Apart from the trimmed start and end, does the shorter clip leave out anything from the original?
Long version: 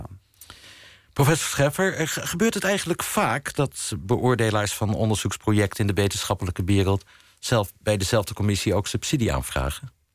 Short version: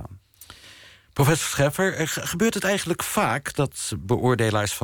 no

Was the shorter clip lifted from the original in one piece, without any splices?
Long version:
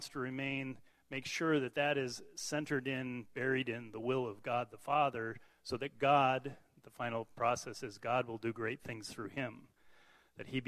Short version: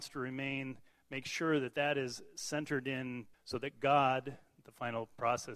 no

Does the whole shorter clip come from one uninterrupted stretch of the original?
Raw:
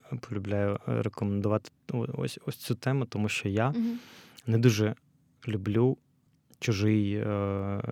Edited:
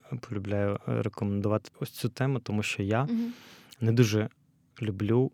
no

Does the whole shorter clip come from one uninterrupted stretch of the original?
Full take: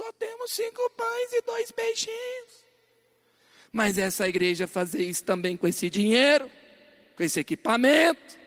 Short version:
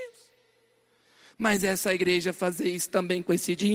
yes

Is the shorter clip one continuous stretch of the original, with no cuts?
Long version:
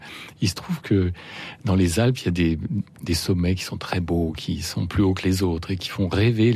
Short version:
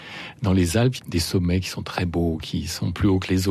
no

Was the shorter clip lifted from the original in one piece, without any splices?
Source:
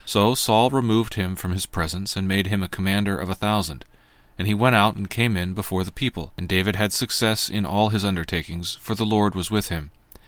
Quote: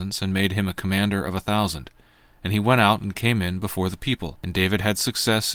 yes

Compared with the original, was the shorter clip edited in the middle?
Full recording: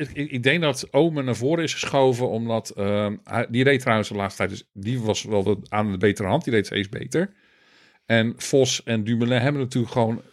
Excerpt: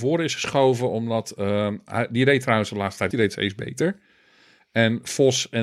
yes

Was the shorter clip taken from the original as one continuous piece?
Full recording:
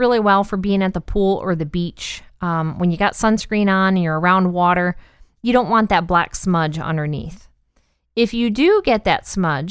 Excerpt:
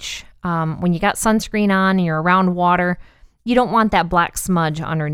yes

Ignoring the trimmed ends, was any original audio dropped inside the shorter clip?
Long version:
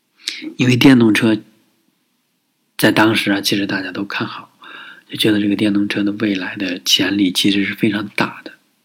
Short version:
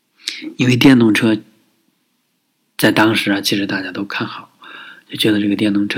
no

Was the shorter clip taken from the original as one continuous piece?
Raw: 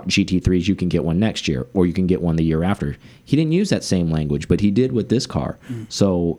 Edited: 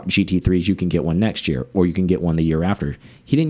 yes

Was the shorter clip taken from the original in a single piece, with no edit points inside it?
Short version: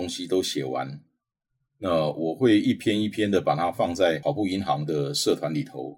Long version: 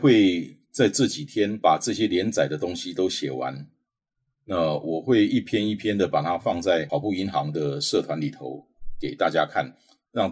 yes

